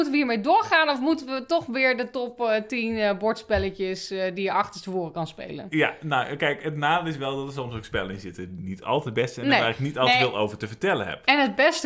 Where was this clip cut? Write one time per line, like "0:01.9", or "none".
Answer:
none